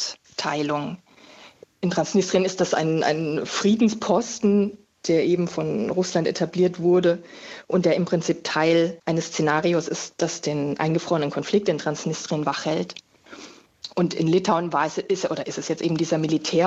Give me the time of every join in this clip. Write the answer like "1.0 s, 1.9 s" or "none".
none